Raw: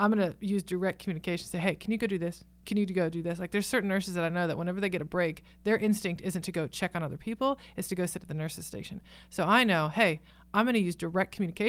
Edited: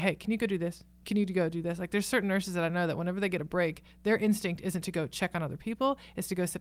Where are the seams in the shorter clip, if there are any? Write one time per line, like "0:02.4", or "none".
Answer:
none